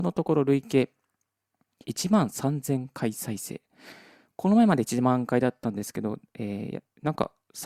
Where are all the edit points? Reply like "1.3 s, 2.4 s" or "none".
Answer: none